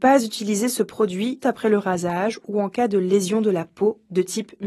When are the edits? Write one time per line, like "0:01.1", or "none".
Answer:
0:01.4